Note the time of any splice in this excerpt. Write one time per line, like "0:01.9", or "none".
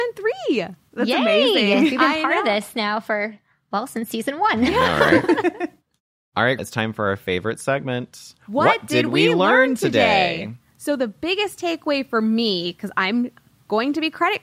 0:06.6